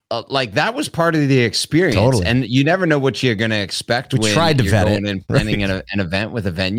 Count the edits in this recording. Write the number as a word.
zero